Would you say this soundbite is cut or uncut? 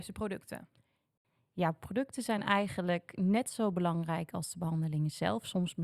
uncut